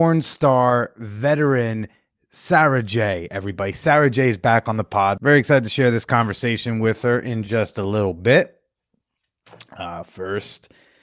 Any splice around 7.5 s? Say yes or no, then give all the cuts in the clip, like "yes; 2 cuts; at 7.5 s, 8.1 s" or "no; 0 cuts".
no; 0 cuts